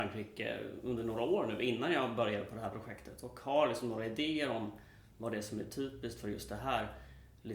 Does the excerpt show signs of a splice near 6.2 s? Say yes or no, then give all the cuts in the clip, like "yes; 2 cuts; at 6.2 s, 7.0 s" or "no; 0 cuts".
no; 0 cuts